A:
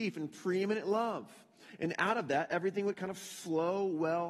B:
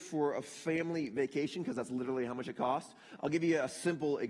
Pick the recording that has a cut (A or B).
B